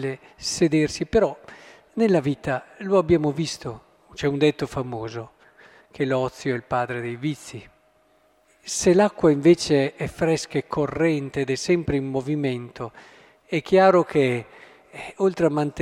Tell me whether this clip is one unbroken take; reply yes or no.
no